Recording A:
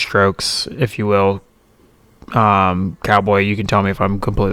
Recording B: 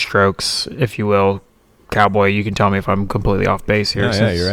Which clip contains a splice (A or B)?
B